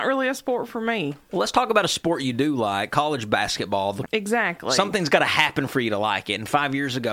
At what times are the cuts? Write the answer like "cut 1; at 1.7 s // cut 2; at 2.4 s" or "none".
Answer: cut 1; at 1.3 s // cut 2; at 4.1 s